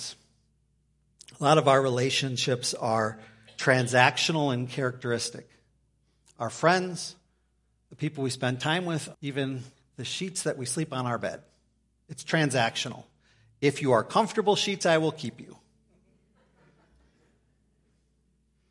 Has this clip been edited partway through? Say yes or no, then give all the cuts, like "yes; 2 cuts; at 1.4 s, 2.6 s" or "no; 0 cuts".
yes; 1 cut; at 9.1 s